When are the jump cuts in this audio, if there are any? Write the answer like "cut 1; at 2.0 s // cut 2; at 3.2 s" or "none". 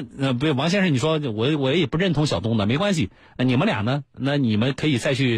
none